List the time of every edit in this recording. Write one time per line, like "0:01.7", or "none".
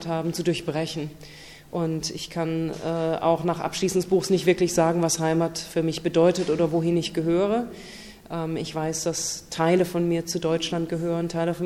none

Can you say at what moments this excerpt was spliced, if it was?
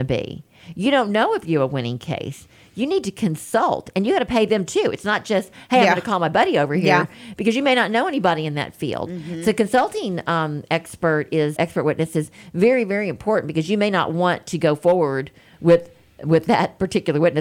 0:11.6

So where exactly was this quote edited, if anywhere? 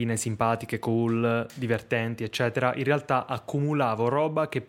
none

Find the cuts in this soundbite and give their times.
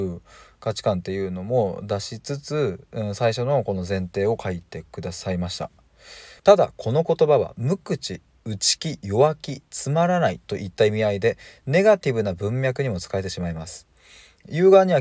0:06.4

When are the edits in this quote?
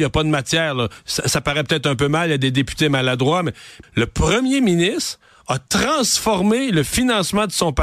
0:03.8

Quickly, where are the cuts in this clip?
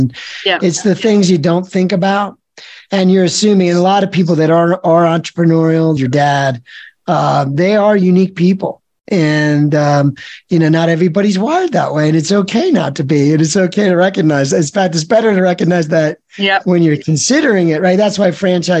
0:06.0

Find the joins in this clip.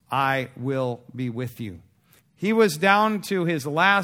0:02.2

